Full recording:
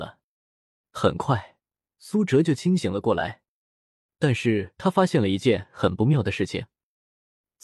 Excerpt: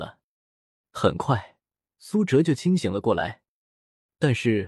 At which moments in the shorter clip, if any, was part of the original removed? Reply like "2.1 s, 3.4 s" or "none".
none